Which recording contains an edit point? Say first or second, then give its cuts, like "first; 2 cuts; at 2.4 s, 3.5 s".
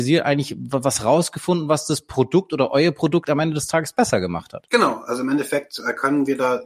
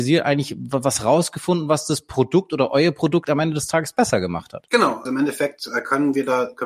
second; 1 cut; at 5.1 s